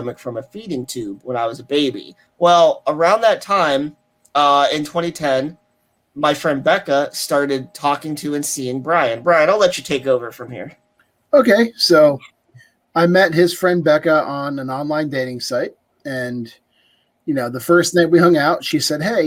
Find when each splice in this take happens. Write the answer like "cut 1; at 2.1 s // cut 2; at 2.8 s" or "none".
cut 1; at 2.3 s